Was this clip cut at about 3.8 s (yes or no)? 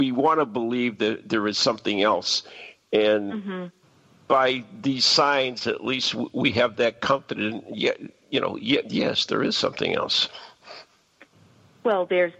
no